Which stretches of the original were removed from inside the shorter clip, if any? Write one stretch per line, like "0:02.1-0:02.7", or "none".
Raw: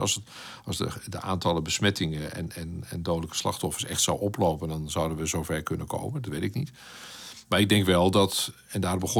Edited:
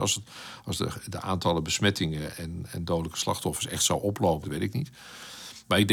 0:02.3-0:02.5
0:04.6-0:06.2